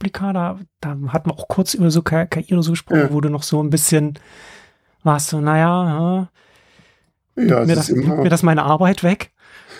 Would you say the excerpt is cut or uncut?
uncut